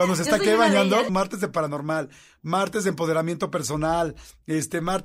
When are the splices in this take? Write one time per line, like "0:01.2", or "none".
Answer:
0:01.1